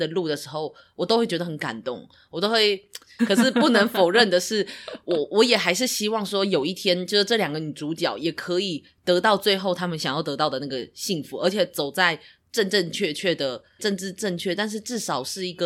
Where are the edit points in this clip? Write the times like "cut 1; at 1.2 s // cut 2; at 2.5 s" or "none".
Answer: cut 1; at 3.2 s // cut 2; at 13.8 s